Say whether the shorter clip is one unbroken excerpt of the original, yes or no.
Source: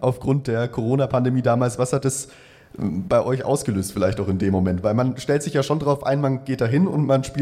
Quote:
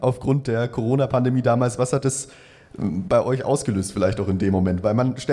yes